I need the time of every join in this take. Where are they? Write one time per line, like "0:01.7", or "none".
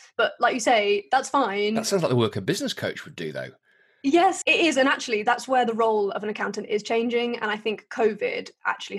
0:04.4